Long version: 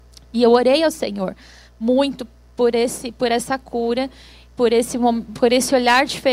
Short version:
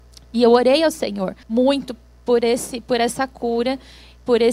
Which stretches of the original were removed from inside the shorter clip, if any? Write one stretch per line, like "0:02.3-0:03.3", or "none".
0:01.4-0:01.7

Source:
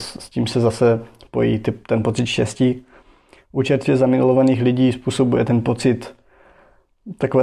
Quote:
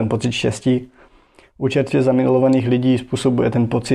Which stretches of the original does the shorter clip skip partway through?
none

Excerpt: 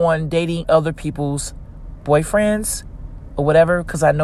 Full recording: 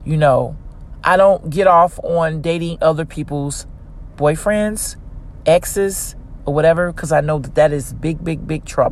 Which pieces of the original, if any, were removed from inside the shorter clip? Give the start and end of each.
0:05.4-0:06.4

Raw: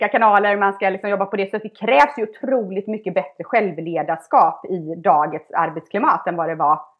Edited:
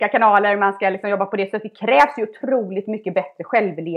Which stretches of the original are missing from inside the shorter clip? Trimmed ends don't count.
none

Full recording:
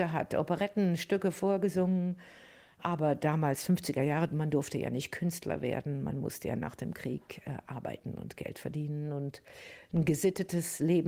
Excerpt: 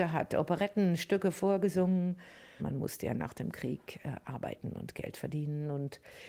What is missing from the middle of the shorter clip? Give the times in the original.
0:02.6-0:06.0

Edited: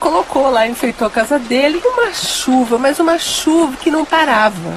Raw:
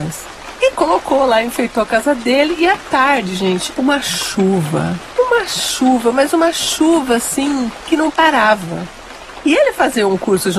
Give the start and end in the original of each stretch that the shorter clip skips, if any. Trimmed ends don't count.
0:02.6-0:05.1
0:07.1-0:07.8

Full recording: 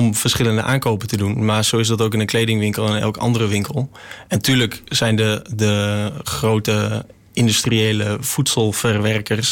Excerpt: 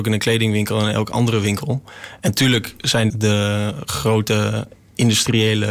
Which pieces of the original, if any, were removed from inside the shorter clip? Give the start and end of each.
0:05.2-0:05.5

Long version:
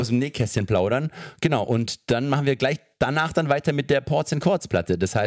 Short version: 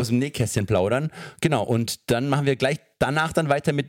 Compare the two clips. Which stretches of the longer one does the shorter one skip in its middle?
none

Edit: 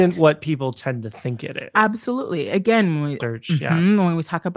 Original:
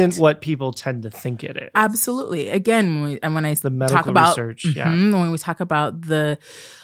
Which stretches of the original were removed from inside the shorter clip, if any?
0:03.2-0:04.4

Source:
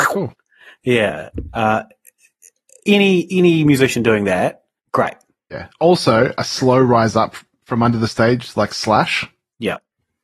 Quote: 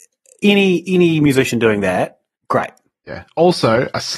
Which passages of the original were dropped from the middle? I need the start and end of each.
none

